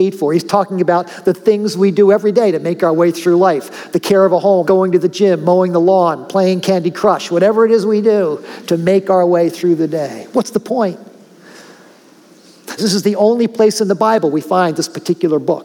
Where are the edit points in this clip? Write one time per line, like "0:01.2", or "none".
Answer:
0:04.6
0:12.8